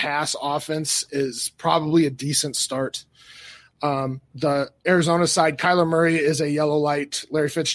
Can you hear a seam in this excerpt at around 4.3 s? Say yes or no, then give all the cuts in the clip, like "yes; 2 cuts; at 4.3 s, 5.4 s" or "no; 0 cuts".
yes; 1 cut; at 4.3 s